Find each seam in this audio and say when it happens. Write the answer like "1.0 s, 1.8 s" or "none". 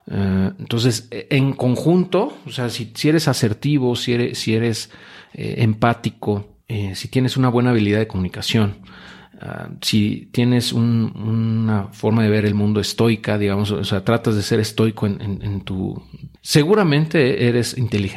6.6 s, 16.4 s

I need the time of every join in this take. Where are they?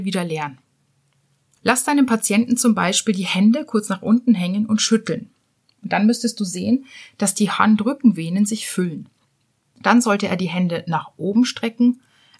1.6 s

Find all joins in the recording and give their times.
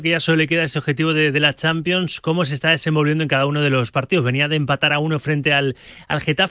none

